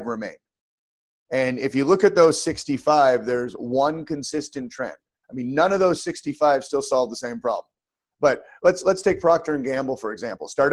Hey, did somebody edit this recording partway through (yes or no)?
no